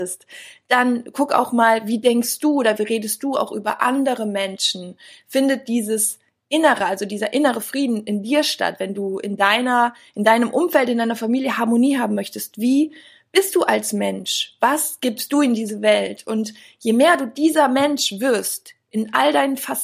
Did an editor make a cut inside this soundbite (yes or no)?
no